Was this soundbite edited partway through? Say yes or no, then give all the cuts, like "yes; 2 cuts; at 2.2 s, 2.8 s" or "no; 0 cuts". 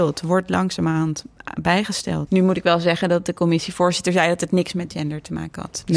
yes; 1 cut; at 2.3 s